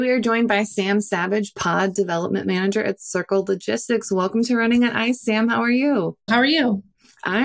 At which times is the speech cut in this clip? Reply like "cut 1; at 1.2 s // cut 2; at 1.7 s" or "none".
cut 1; at 6.3 s